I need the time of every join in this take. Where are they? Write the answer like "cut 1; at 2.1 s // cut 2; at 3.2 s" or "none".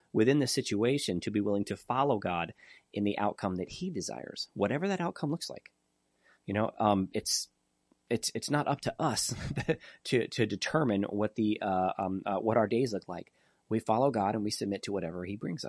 none